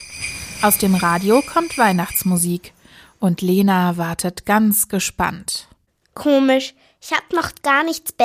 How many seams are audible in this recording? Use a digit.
0